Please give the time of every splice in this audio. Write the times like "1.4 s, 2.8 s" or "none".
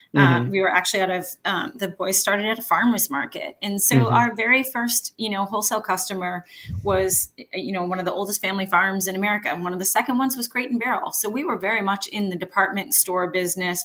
none